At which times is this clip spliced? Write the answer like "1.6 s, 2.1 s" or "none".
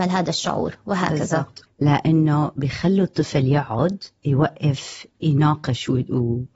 1.6 s